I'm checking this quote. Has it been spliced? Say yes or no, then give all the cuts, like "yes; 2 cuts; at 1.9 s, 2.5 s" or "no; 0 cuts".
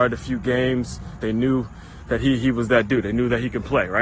yes; 1 cut; at 1.2 s